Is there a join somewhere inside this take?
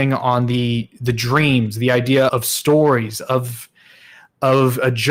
yes; 1 cut; at 2.3 s

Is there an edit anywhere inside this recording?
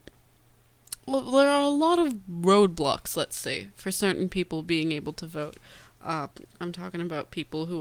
no; 0 cuts

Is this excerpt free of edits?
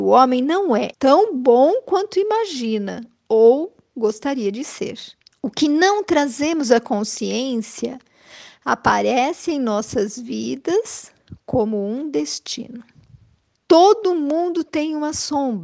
no; 3 cuts; at 0.9 s, 5.3 s, 13.6 s

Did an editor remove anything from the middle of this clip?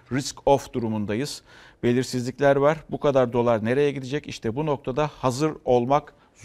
no; 0 cuts

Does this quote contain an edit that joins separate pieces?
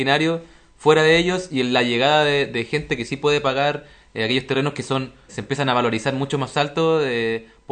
yes; 1 cut; at 5.3 s

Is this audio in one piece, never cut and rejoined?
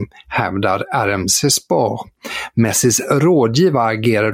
yes; 0 cuts

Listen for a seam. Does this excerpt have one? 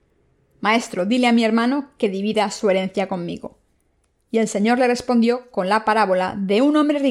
no; 0 cuts

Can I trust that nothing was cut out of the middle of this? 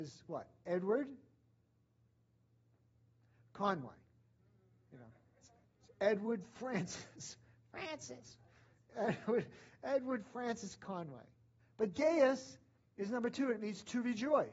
no; 1 cut; at 11.6 s

